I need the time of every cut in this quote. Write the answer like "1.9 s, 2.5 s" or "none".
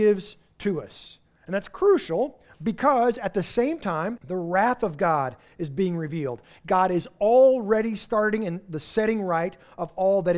4.2 s